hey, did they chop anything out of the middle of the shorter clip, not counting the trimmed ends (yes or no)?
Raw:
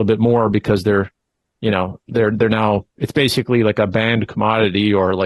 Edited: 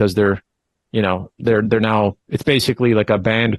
no